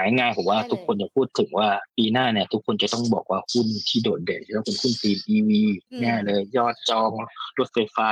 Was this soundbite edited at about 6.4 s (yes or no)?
no